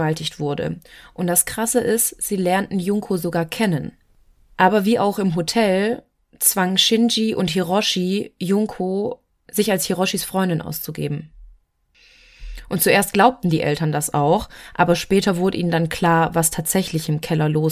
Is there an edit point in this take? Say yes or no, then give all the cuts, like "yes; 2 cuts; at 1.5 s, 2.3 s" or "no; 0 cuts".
no; 0 cuts